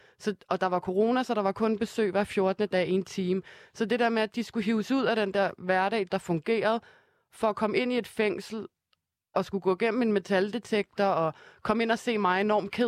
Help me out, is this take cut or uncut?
cut